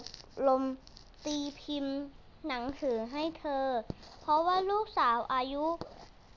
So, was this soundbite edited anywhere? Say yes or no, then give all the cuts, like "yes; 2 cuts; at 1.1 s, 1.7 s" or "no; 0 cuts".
no; 0 cuts